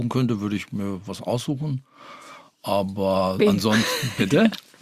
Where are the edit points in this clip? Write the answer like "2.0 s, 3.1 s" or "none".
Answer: none